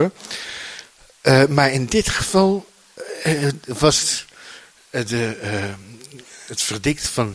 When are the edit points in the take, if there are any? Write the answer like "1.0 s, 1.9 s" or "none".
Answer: none